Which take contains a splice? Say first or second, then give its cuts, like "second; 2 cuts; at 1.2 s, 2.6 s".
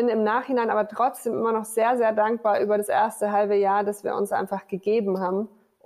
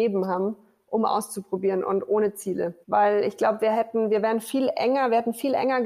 second; 1 cut; at 2.8 s